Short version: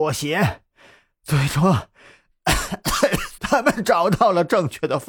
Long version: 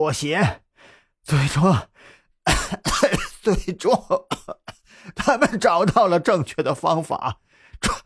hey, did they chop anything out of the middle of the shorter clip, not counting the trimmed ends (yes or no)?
yes